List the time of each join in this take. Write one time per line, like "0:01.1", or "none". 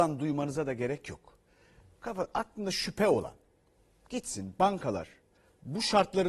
none

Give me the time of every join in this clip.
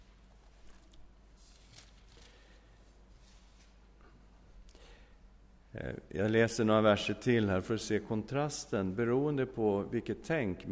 none

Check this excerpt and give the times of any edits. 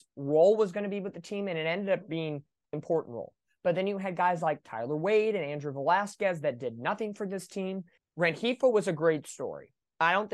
0:02.7
0:08.0

